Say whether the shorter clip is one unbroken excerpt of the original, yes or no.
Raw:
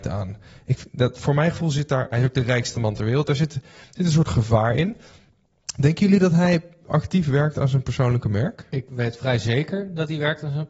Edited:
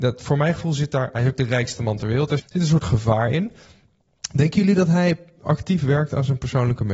no